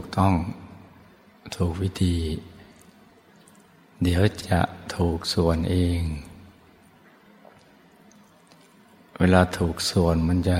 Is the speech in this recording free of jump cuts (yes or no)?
no